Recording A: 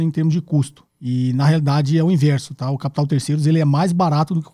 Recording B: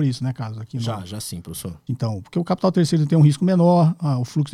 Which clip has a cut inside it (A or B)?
B